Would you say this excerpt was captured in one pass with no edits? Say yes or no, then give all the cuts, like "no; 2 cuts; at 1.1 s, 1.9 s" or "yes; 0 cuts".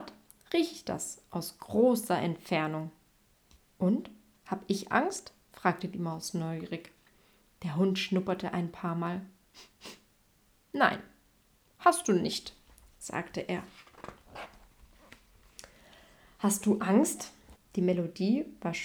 no; 1 cut; at 17.6 s